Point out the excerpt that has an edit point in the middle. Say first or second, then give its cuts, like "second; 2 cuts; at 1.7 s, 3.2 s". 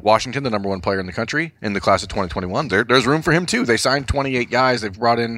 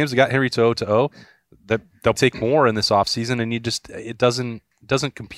second; 1 cut; at 2.1 s